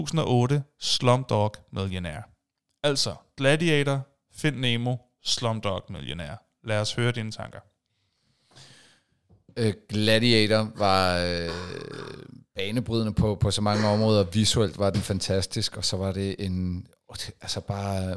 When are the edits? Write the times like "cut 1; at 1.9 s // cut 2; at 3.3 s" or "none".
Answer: none